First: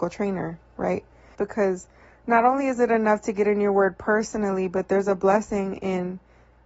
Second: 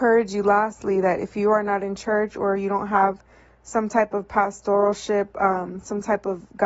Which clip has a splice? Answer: first; 1 cut; at 1.3 s

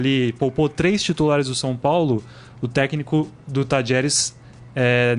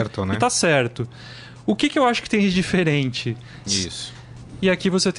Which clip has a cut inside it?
second; 1 cut; at 3.7 s

